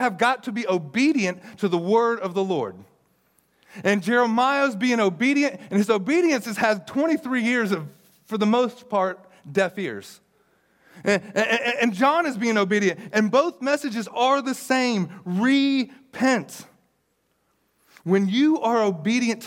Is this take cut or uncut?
uncut